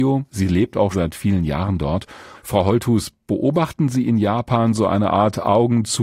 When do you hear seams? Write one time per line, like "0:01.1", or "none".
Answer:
0:00.9
0:02.3